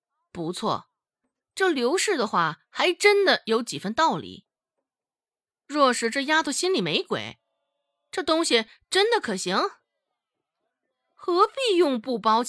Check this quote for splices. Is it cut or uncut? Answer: uncut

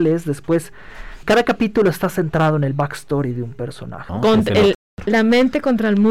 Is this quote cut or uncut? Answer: cut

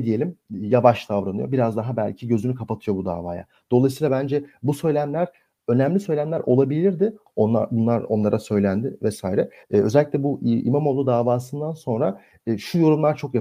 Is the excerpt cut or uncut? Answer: cut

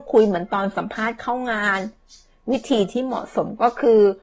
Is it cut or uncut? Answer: uncut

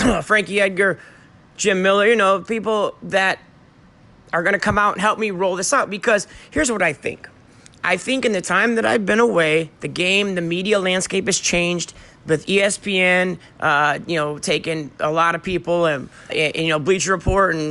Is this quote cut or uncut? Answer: cut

